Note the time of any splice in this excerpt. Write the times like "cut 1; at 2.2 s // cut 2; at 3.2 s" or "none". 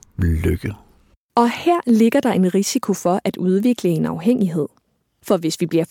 none